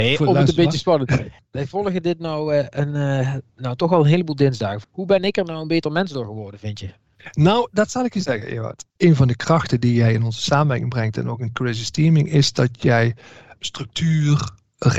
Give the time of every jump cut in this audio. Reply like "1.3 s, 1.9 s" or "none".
none